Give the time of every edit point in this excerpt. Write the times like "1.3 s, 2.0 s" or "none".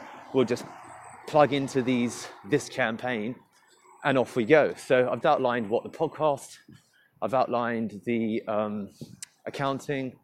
5.2 s